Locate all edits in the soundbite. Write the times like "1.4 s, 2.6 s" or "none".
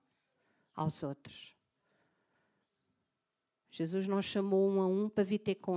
none

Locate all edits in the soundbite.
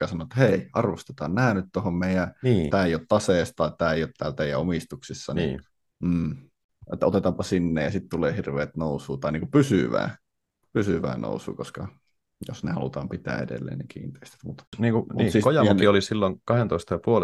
2.7 s

